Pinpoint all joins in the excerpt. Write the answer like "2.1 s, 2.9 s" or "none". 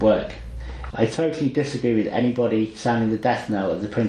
0.9 s